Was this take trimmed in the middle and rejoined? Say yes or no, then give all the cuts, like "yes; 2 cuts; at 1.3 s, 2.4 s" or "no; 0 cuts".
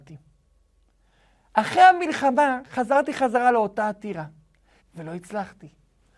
yes; 1 cut; at 4.8 s